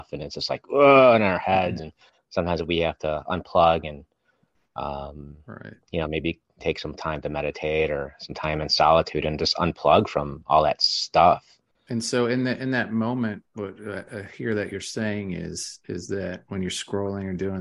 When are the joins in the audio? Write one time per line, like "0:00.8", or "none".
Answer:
none